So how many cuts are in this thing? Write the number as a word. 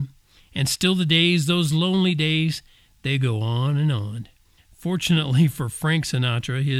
one